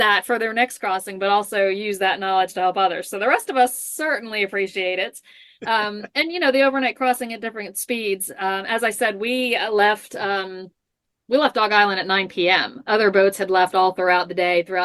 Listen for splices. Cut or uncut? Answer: uncut